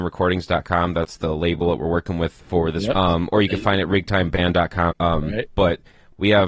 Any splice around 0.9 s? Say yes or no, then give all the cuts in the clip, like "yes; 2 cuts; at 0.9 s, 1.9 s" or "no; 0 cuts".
no; 2 cuts; at 2.9 s, 4.9 s